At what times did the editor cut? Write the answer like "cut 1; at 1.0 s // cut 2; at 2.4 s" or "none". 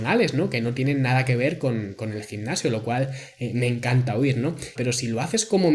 cut 1; at 4.7 s